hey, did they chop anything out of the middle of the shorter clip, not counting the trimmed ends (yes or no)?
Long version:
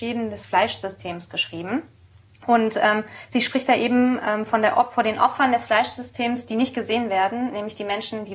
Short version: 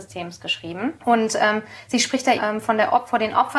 yes